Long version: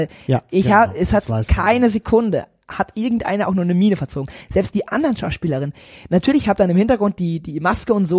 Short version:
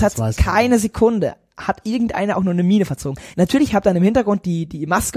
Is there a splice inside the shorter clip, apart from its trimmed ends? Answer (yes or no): yes